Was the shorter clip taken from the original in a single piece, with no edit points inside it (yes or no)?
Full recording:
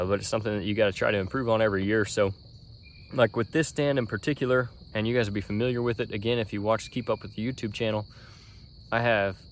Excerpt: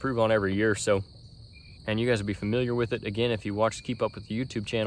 no